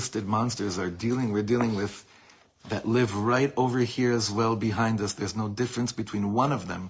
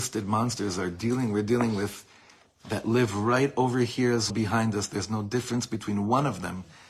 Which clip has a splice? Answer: second; 1 cut; at 4.3 s

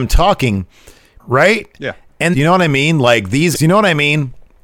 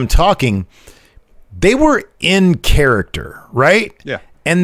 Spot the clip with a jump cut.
first; 3 cuts; at 1.2 s, 2.3 s, 3.5 s

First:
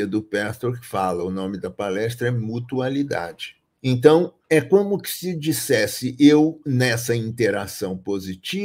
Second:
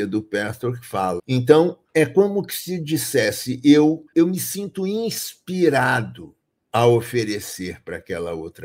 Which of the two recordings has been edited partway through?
second; 2 cuts; at 1.2 s, 4.1 s

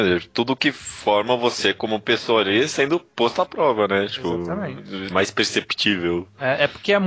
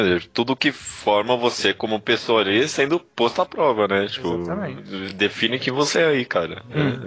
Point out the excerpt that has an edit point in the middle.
first; 1 cut; at 5.1 s

